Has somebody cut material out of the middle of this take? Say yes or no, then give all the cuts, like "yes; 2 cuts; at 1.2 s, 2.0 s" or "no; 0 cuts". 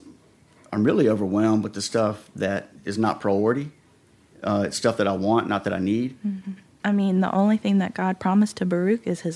yes; 1 cut; at 6.8 s